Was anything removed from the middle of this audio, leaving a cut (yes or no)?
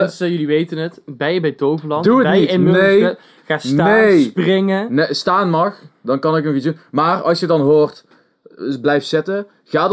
no